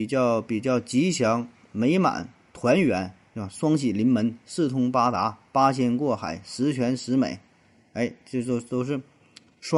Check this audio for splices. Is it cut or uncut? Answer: uncut